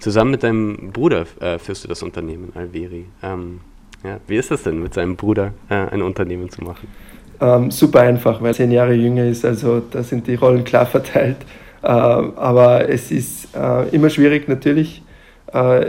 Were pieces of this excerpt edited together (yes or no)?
yes